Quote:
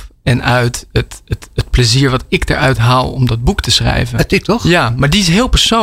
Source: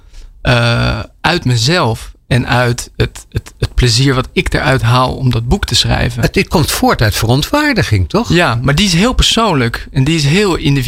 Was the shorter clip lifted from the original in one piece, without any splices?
no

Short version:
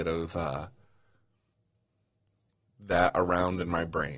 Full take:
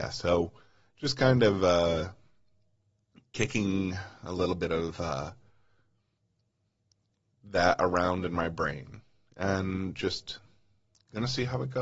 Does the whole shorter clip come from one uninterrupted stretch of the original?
yes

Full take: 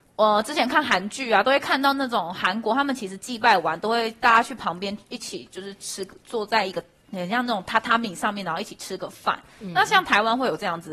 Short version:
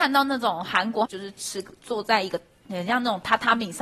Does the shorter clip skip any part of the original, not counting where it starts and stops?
yes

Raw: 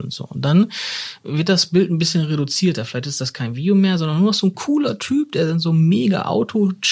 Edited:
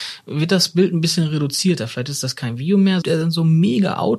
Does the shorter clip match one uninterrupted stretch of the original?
no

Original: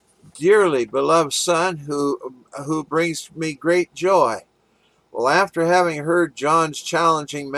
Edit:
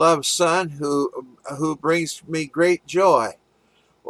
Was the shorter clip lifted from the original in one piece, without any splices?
yes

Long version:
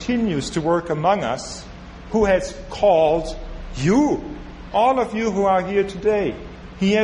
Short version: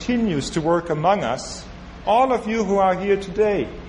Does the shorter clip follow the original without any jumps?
no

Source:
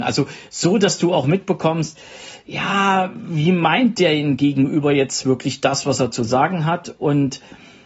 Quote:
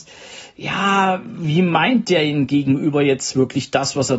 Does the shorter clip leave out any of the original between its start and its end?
no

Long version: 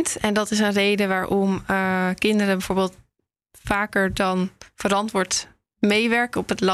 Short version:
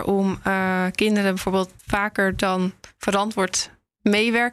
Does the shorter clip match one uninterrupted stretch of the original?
no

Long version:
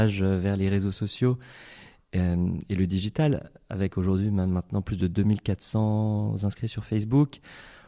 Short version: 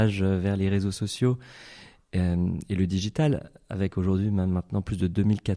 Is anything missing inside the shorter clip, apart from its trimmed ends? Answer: no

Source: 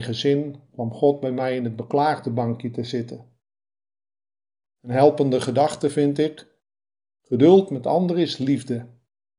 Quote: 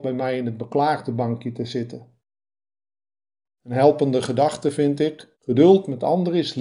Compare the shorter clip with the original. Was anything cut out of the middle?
yes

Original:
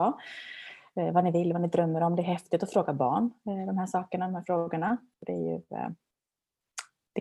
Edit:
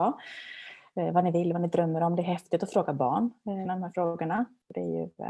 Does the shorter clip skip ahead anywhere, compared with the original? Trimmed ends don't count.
yes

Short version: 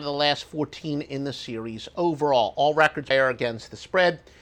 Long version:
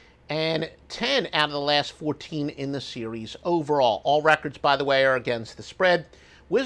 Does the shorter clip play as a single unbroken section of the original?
no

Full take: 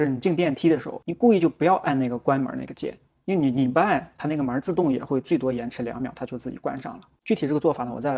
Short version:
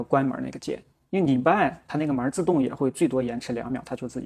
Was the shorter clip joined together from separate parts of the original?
yes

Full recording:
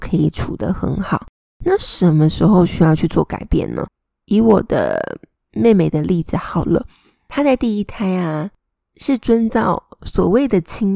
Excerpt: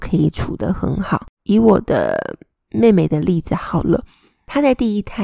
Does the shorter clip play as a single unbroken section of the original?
no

